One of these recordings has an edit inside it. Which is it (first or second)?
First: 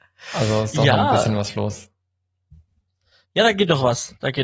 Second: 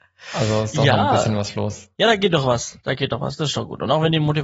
second